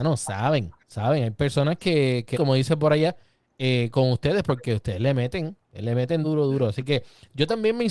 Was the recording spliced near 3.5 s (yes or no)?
no